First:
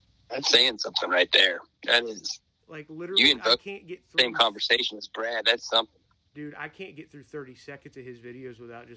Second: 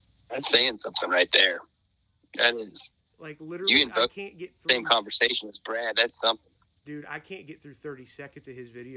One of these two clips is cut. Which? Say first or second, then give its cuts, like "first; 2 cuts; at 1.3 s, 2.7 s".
first; 1 cut; at 1.7 s